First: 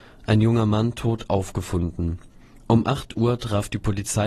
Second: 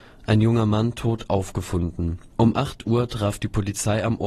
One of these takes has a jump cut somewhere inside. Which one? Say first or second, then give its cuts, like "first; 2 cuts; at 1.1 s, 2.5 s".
second; 1 cut; at 2.3 s